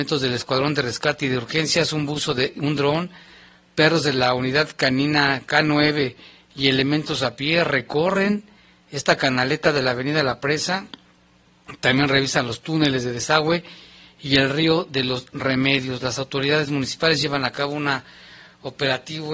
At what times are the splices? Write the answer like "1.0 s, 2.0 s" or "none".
none